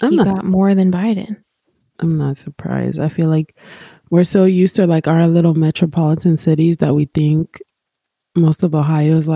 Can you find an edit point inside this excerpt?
no; 0 cuts

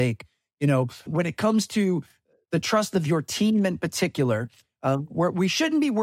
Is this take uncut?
no; 1 cut; at 1.1 s

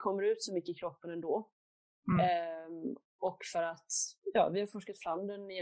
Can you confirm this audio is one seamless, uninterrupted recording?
yes; 0 cuts

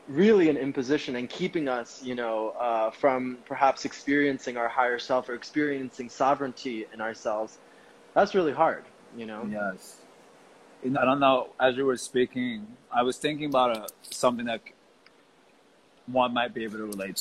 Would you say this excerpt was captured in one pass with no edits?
no; 1 cut; at 11.0 s

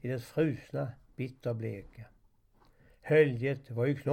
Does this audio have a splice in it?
no; 0 cuts

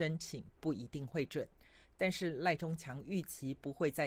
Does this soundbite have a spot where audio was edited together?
no; 0 cuts

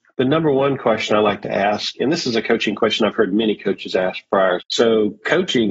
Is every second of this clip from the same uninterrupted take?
no; 1 cut; at 4.6 s

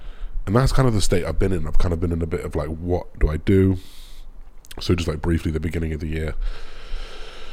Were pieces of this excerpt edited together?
no; 0 cuts

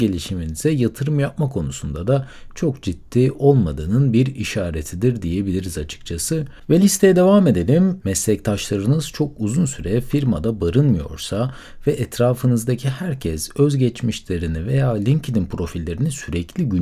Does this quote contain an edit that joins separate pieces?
yes; 1 cut; at 8.0 s

